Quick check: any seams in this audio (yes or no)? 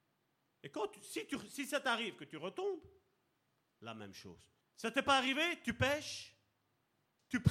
yes